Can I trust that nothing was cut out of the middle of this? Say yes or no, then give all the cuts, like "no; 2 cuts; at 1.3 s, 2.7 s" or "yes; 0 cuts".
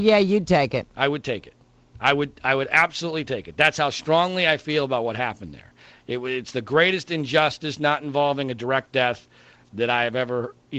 yes; 0 cuts